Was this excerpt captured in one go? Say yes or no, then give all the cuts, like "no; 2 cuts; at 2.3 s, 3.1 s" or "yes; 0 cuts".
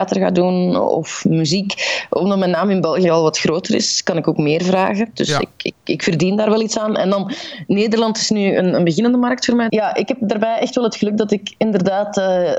no; 1 cut; at 9.7 s